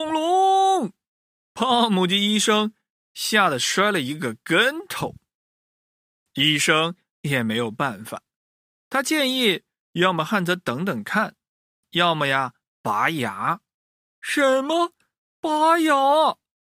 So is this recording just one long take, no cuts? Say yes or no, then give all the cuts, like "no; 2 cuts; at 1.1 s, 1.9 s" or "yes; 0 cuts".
yes; 0 cuts